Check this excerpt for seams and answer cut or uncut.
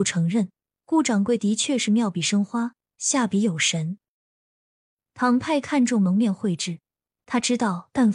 uncut